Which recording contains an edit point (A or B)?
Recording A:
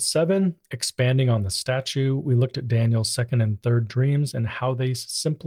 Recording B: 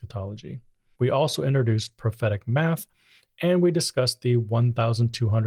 B